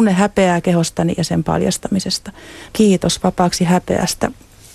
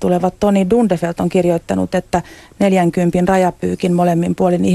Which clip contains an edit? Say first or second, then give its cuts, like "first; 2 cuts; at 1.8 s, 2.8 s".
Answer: first; 1 cut; at 2.7 s